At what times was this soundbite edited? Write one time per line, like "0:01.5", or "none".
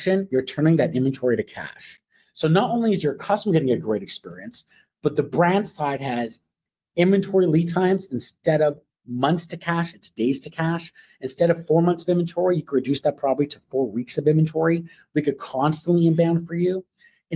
none

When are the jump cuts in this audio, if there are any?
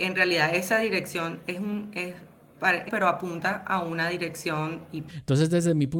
0:02.9
0:05.1

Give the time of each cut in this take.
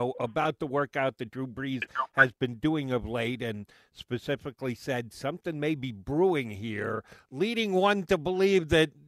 none

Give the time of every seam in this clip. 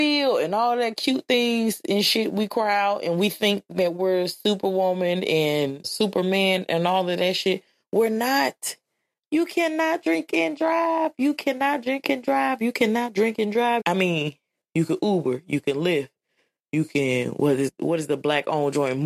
0:05.8
0:13.8

